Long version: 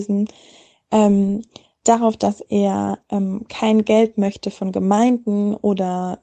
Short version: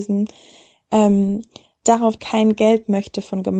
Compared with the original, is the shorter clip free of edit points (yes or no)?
no